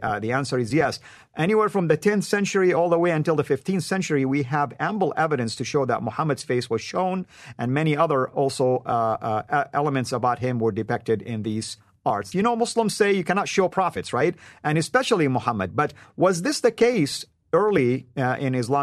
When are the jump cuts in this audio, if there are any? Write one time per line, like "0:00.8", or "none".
0:12.3